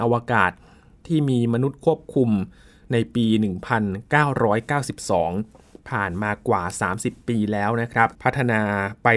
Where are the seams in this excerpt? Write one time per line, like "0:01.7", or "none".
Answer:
0:08.1